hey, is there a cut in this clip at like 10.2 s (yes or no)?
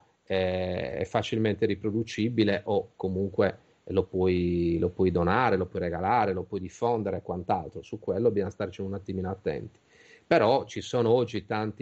no